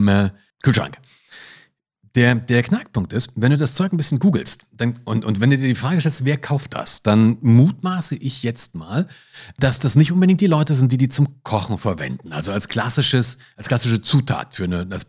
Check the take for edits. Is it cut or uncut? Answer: uncut